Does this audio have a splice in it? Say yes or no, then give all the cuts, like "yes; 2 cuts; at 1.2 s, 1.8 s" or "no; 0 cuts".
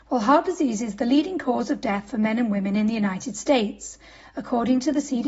no; 0 cuts